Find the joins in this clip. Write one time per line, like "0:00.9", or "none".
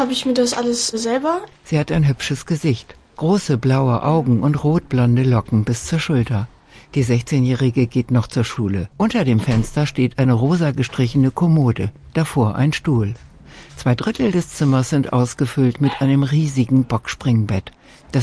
0:08.9
0:12.1